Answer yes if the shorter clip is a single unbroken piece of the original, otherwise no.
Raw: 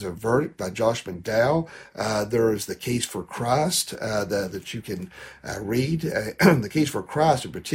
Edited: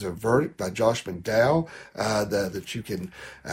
no